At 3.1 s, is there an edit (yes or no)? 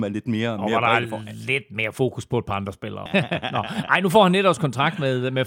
yes